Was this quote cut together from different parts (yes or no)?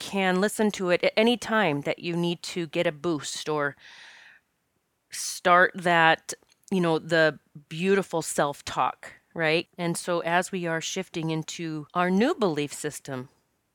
yes